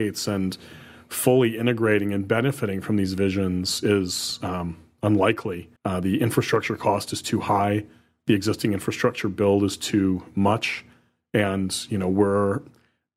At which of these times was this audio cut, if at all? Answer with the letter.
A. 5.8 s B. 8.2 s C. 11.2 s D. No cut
A